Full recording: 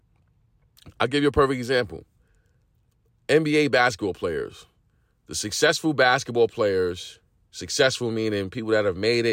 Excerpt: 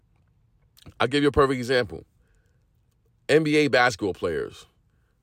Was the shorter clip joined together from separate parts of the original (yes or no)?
no